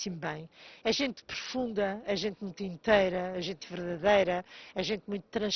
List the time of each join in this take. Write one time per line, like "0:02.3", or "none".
0:03.6